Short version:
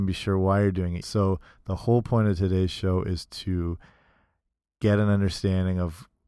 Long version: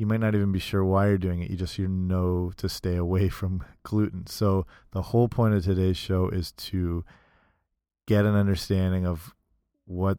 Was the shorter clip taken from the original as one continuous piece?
no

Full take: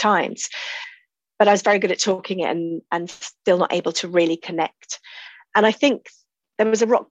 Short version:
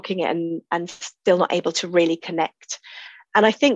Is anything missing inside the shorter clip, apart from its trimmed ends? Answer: no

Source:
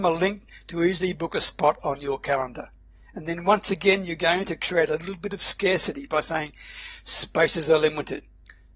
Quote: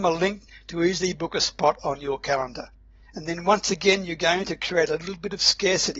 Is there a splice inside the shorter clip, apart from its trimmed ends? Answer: no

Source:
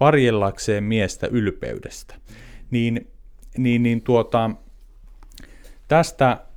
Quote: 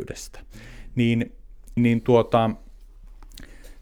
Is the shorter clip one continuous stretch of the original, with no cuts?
no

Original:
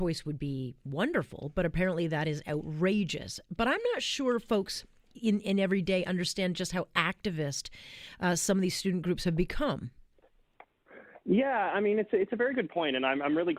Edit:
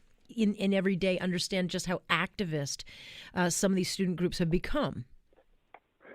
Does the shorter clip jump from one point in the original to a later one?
no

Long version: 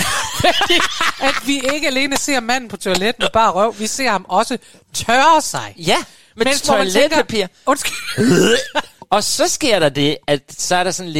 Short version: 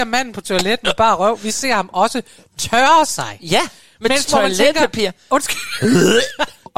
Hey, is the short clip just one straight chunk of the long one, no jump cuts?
yes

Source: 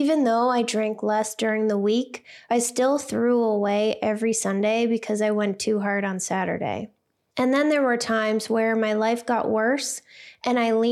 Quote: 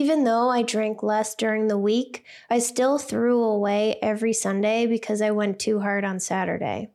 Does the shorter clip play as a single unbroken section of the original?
yes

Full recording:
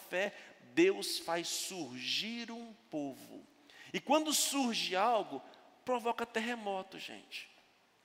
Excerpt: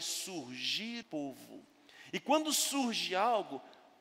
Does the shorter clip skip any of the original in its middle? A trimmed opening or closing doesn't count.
yes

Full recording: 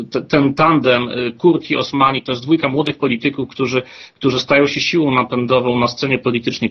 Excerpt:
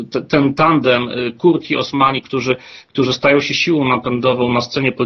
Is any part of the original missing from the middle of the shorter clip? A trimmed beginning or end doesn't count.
yes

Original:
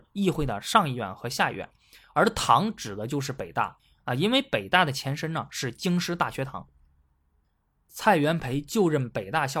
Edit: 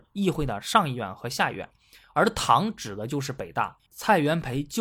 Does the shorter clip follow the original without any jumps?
no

